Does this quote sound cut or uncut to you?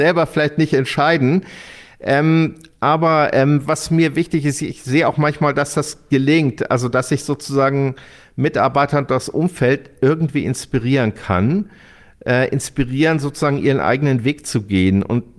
uncut